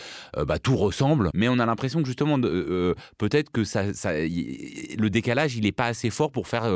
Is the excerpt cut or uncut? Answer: cut